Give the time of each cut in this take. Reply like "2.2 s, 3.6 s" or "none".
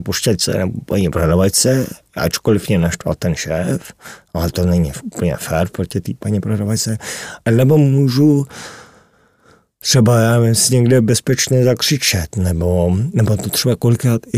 6.2 s

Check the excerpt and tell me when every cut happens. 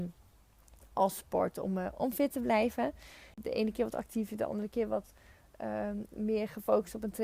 3.3 s

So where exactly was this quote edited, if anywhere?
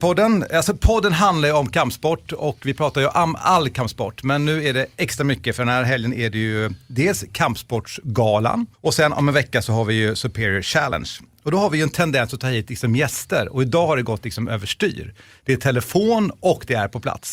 8.7 s

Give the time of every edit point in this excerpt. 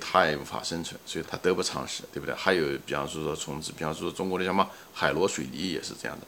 1.2 s

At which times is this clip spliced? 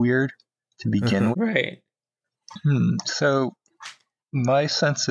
1.3 s

